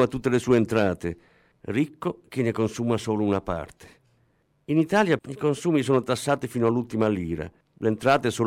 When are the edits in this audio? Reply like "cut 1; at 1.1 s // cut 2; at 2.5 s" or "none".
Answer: cut 1; at 5.2 s